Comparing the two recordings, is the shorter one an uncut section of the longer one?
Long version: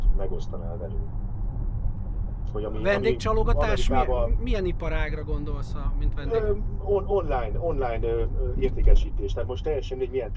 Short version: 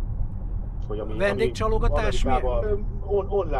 no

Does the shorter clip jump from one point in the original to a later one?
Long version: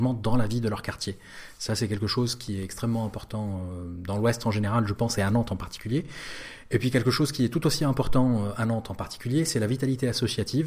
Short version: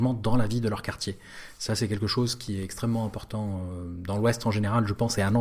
no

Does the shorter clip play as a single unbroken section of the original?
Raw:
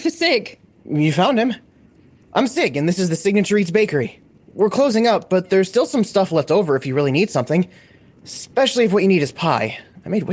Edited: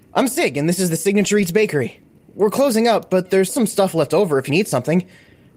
no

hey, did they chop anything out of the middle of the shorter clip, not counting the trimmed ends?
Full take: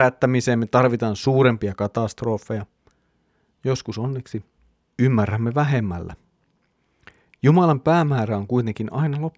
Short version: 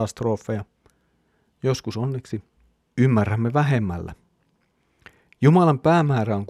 no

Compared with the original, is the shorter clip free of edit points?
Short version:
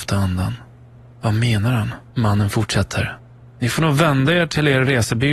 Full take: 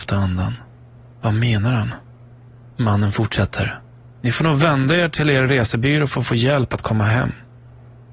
no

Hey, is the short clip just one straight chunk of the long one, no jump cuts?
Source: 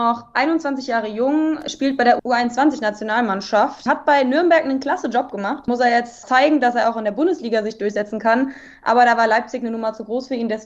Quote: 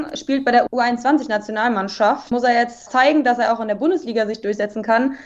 no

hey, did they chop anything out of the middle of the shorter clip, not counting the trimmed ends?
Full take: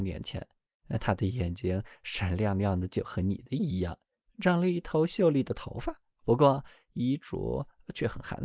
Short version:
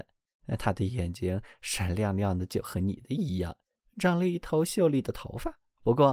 no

